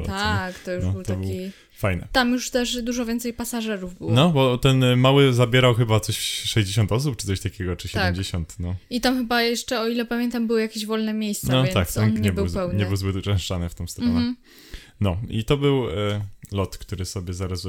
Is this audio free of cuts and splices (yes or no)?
no